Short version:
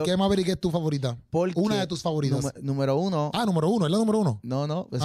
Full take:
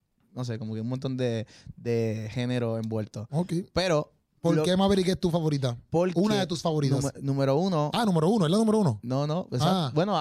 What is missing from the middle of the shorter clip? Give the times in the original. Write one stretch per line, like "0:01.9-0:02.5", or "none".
none